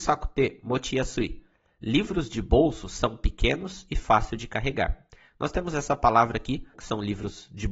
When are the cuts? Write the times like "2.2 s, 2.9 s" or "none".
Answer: 6.7 s